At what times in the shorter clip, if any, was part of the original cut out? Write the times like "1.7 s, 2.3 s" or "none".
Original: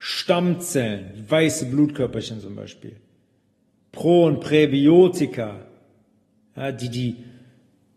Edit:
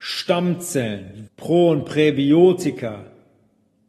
1.3 s